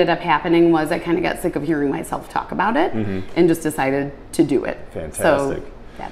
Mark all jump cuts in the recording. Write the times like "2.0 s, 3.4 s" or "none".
none